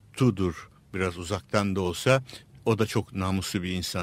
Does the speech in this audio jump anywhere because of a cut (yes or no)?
yes